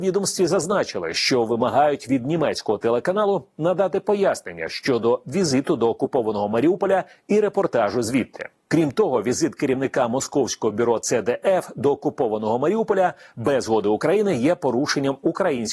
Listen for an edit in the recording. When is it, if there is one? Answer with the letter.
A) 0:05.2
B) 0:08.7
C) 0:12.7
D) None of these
B